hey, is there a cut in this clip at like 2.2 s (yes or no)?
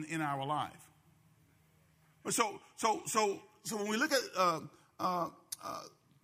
yes